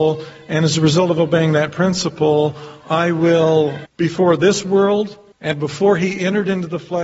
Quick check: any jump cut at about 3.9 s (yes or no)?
yes